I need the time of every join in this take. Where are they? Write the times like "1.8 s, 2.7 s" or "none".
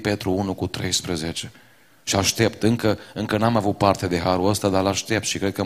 none